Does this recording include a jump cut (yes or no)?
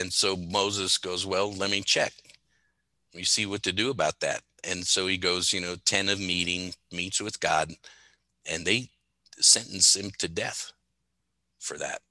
no